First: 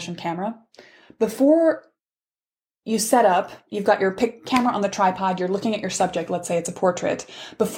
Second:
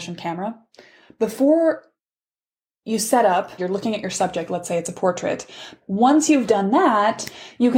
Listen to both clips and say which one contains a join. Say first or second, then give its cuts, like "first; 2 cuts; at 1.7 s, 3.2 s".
second; 2 cuts; at 3.6 s, 5.8 s